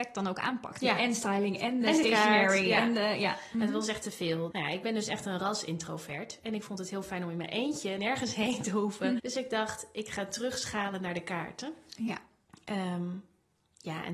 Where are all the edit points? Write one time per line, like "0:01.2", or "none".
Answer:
0:04.5
0:08.0
0:09.2